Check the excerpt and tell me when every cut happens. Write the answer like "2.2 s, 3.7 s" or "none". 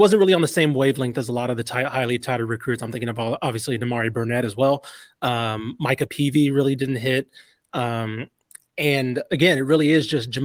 none